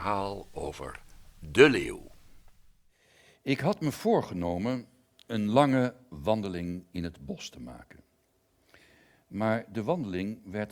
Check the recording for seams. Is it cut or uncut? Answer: uncut